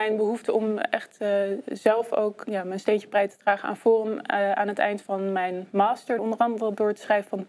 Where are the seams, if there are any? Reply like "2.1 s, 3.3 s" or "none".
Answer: 2.4 s, 6.2 s